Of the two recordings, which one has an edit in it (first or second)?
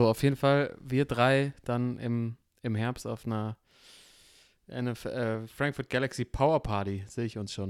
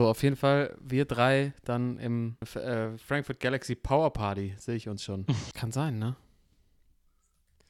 second